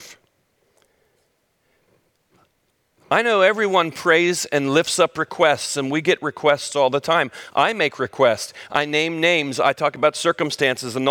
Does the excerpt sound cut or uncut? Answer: uncut